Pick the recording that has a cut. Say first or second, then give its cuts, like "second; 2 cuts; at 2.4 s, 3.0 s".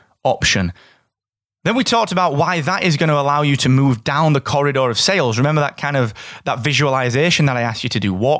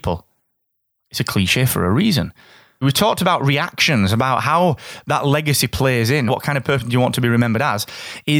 second; 2 cuts; at 2.8 s, 6.3 s